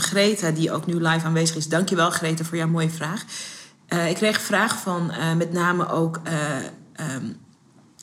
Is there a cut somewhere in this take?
no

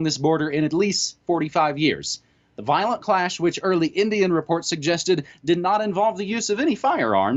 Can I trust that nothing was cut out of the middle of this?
yes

